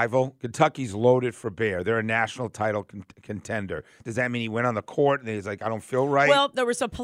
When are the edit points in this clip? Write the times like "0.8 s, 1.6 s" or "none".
4.0 s